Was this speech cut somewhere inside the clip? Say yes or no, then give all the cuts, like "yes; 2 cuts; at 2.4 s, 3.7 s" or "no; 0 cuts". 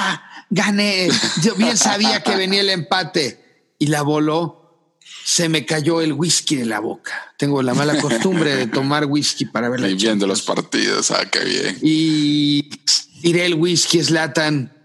no; 0 cuts